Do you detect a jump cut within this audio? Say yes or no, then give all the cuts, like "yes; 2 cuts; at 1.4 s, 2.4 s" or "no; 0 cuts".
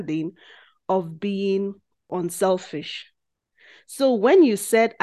no; 0 cuts